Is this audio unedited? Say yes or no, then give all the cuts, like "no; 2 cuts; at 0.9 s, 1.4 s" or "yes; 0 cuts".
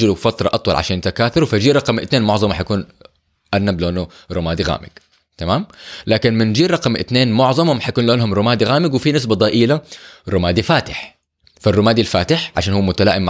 yes; 0 cuts